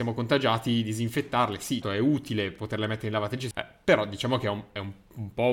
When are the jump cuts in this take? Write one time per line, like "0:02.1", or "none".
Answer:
0:01.8
0:03.5